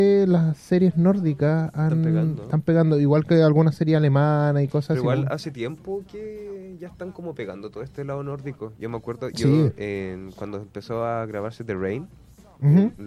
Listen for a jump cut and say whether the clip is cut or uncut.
uncut